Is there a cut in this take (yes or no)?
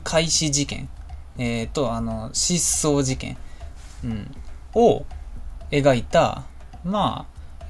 no